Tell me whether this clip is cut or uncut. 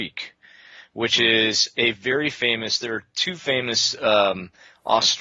uncut